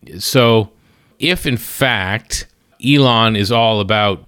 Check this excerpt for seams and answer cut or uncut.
uncut